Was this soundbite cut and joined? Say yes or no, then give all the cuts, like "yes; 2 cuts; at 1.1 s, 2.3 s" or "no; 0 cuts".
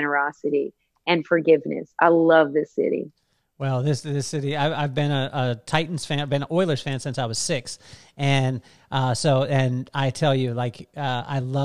no; 0 cuts